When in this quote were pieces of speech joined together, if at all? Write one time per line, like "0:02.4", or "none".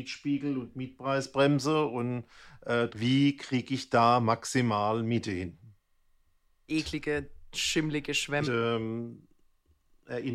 0:02.9
0:06.7
0:08.4